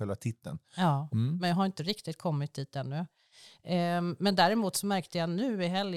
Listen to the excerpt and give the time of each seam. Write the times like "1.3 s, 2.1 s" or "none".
1.1 s

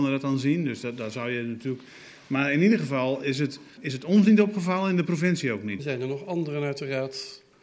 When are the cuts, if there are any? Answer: 3.8 s, 5.8 s

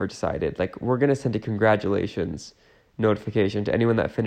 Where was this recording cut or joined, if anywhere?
none

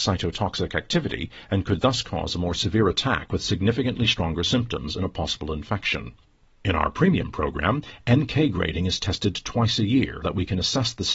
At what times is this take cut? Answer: 10.2 s

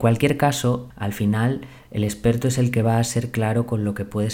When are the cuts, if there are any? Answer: 0.9 s

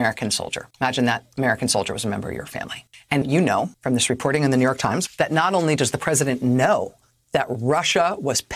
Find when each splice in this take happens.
3.2 s, 5.1 s

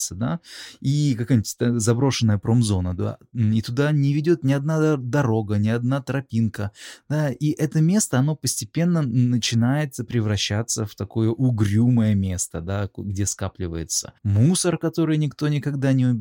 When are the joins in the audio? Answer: 14.2 s

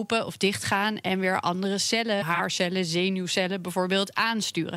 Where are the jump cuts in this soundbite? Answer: 2.2 s

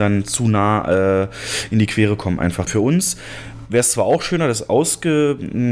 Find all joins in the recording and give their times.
2.7 s

